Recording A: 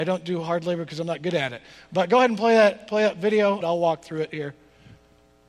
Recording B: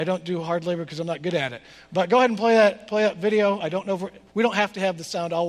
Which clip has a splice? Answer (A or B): A